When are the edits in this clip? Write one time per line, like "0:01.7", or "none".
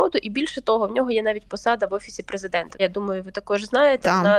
0:02.8